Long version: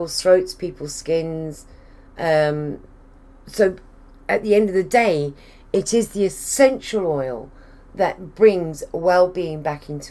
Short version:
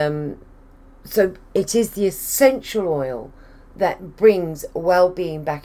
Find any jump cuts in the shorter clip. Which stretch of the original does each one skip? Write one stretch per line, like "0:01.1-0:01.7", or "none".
0:04.0-0:05.7